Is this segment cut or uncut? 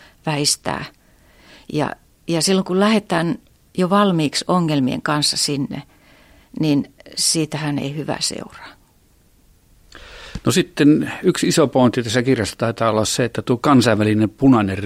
uncut